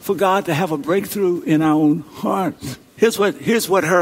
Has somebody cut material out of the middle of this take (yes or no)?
yes